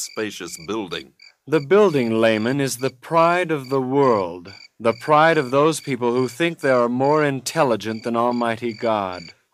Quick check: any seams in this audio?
no; 0 cuts

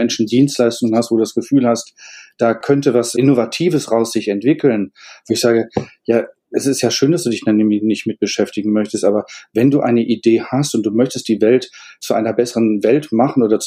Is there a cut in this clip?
yes; 1 cut; at 5.2 s

